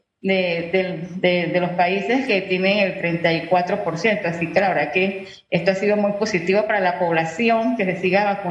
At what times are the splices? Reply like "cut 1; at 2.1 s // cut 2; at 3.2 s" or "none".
none